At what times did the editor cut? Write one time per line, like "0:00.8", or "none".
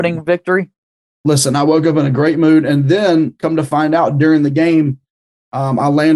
none